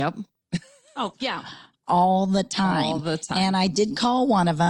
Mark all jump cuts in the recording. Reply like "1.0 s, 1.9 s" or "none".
none